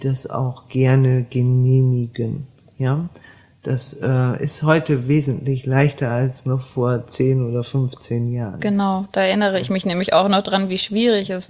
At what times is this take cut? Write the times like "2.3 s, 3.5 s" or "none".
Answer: none